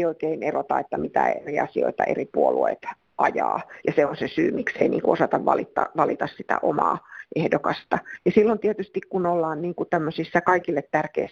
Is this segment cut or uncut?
uncut